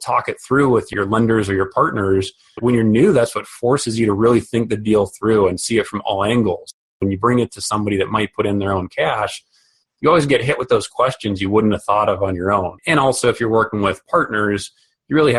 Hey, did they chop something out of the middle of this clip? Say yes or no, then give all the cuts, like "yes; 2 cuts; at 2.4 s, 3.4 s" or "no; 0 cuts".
yes; 1 cut; at 12.8 s